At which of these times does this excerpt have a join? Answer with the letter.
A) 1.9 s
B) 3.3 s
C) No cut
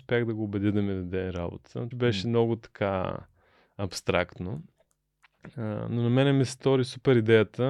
A